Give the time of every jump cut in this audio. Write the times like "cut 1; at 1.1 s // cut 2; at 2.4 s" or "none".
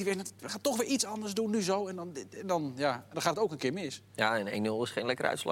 none